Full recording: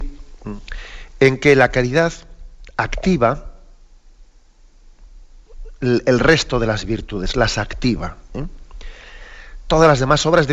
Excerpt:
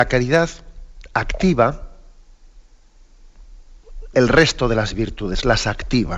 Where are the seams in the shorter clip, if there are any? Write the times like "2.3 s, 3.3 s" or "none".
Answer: 4.1 s